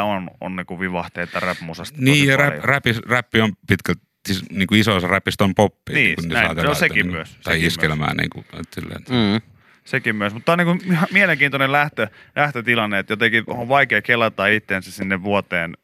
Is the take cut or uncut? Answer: uncut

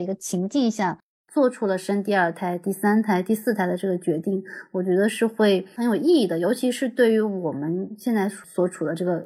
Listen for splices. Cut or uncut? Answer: uncut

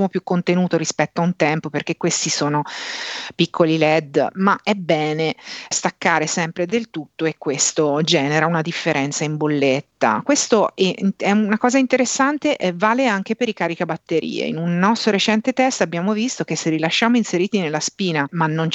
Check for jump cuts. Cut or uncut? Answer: uncut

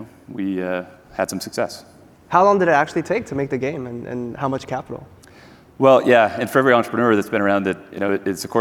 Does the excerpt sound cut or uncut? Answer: uncut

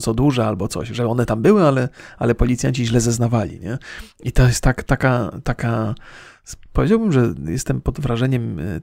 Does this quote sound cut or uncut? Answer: uncut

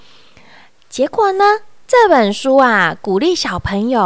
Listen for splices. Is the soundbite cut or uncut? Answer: cut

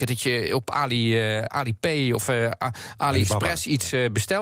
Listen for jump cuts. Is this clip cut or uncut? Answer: uncut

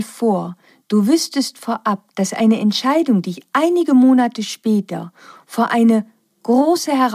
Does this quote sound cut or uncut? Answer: uncut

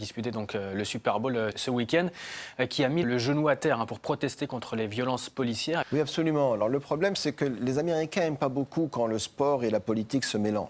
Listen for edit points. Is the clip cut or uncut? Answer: cut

